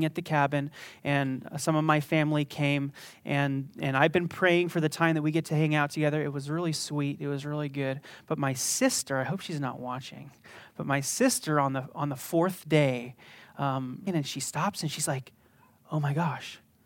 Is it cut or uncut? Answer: cut